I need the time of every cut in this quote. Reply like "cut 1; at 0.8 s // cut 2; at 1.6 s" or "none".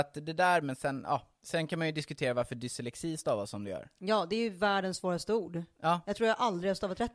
none